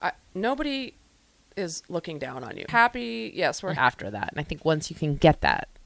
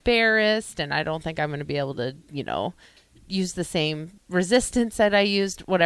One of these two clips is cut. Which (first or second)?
first